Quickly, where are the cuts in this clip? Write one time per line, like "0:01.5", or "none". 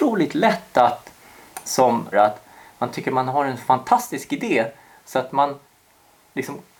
0:02.1